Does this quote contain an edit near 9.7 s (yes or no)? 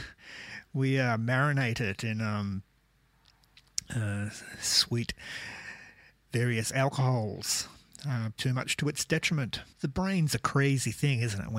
yes